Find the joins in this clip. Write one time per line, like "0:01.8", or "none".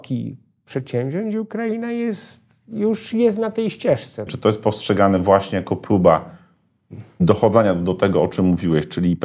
0:04.3

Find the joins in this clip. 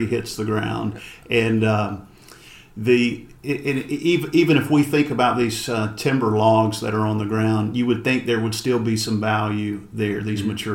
0:03.3

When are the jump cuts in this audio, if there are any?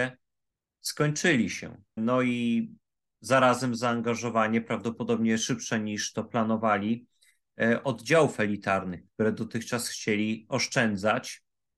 0:02.0

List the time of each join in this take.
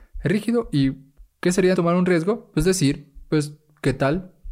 0:01.7

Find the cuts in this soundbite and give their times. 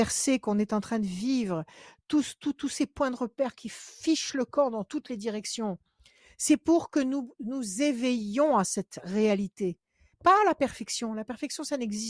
0:10.1

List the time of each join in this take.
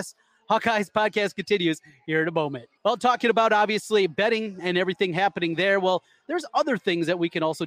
0:02.8

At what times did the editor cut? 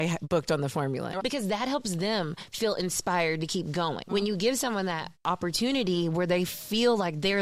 0:01.2
0:04.1

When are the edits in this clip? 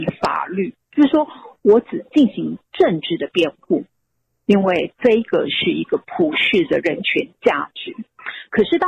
0:01.6

